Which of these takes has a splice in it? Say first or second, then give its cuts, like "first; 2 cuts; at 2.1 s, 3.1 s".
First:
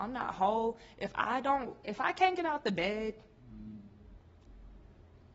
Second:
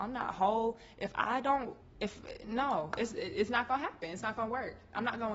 second; 1 cut; at 1.8 s